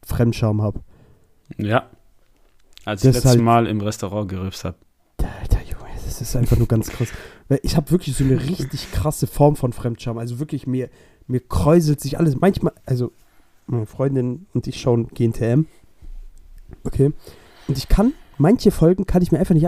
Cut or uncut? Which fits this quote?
uncut